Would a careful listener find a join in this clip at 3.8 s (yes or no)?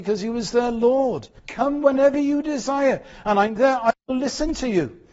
no